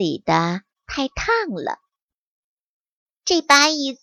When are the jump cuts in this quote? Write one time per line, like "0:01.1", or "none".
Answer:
0:03.1